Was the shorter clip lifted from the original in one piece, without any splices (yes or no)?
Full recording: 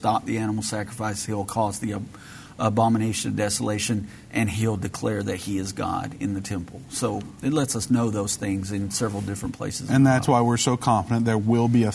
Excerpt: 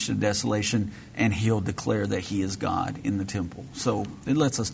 yes